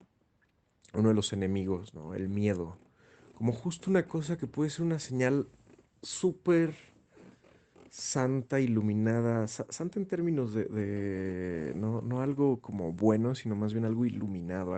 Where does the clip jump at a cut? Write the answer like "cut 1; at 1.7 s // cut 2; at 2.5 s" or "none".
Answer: none

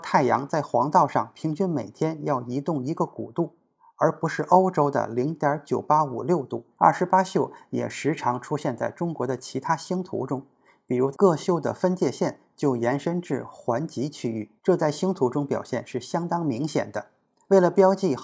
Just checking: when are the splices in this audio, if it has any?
cut 1; at 6.7 s // cut 2; at 11.1 s // cut 3; at 14.6 s

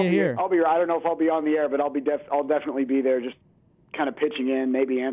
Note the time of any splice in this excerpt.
none

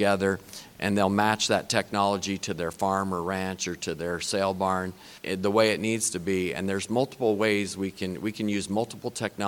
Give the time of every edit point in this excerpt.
cut 1; at 5.2 s

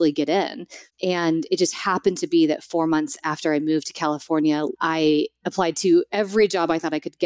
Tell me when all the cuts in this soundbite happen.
cut 1; at 4.7 s

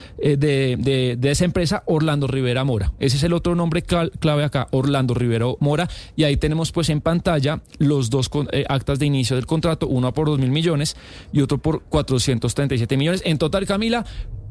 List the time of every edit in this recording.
none

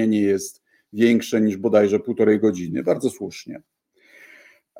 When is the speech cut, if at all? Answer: none

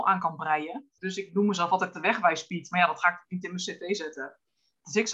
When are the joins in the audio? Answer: cut 1; at 1.0 s

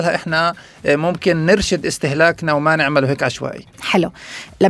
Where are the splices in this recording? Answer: cut 1; at 3.7 s

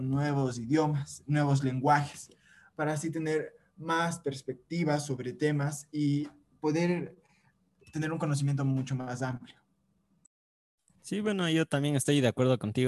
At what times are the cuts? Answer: cut 1; at 11.0 s

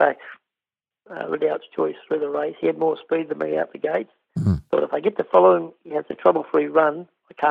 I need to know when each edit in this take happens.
cut 1; at 0.9 s

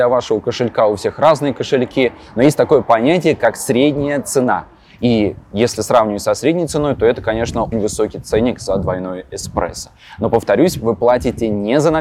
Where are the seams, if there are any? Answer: cut 1; at 7.7 s

